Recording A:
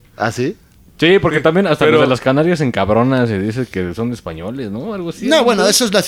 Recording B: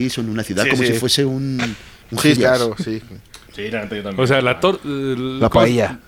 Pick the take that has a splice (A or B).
B